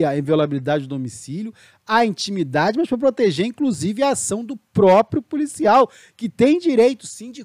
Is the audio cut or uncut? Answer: uncut